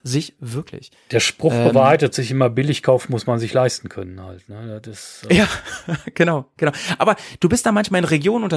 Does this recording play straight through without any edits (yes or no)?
yes